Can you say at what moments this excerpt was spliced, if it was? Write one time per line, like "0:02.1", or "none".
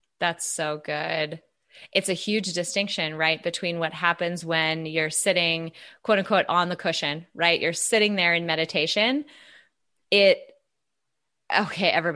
none